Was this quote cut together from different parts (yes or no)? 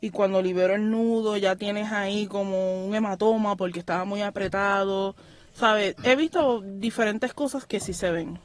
no